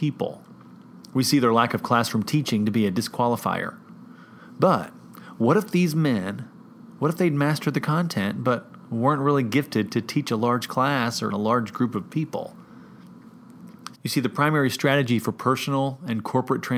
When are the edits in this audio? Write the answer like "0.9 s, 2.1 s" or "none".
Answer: 11.3 s, 13.9 s